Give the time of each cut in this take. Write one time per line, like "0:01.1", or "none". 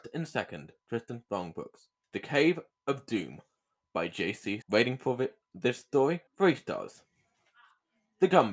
0:02.0
0:04.6
0:06.3